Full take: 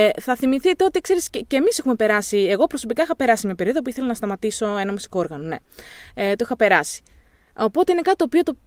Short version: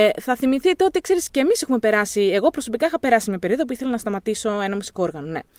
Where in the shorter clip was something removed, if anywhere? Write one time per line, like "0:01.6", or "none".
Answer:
0:01.3